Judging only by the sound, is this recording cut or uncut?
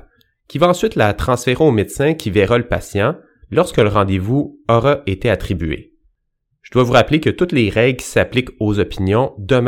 uncut